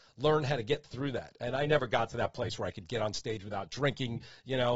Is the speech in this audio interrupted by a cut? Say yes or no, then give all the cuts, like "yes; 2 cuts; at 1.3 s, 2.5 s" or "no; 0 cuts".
no; 0 cuts